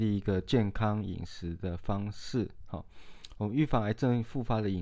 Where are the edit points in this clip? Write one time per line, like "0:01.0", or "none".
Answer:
none